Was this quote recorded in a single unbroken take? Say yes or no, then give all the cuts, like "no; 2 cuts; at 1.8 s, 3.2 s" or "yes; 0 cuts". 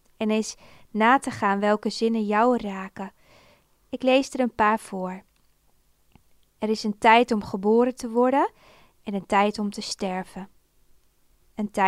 yes; 0 cuts